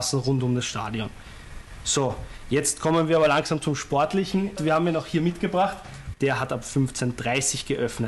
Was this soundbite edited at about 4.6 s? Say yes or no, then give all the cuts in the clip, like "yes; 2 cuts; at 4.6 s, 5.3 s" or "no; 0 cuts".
yes; 2 cuts; at 4.6 s, 6.1 s